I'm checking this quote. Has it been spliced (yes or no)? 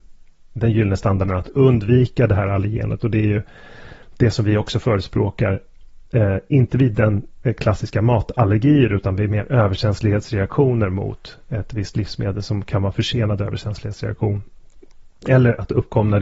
no